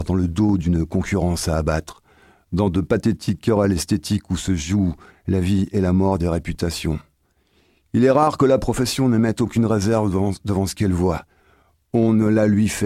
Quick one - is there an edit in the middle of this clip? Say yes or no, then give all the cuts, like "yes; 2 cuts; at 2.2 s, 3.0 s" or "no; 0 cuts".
no; 0 cuts